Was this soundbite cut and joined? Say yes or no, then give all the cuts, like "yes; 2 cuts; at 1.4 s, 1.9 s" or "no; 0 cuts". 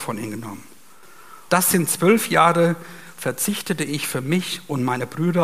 yes; 1 cut; at 1.5 s